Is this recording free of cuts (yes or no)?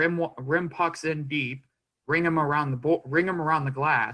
yes